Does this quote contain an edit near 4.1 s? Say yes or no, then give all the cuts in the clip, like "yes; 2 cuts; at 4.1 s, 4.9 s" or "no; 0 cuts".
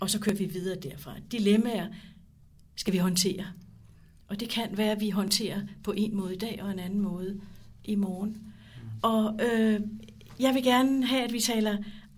no; 0 cuts